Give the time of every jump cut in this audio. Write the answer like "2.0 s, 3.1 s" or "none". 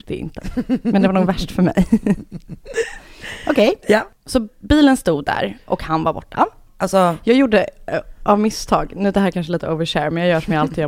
6.7 s